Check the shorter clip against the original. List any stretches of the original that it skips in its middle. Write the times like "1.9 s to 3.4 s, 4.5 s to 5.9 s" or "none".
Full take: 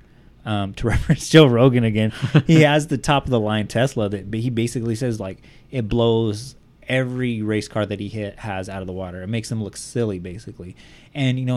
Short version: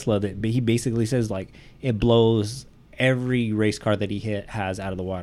none